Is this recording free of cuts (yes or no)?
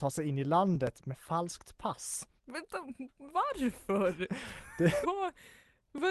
no